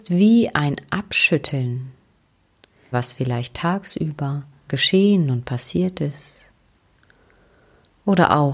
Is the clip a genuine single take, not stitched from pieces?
no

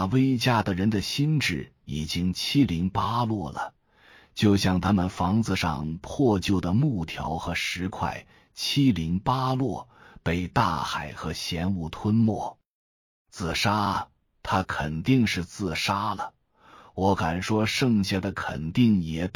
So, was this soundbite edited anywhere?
no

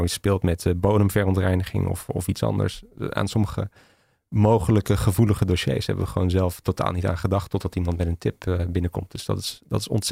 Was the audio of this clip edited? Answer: no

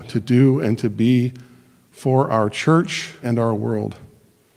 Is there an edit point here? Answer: yes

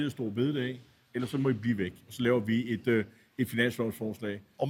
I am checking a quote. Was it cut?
no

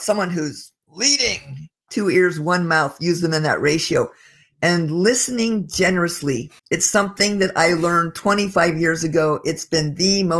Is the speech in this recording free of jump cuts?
no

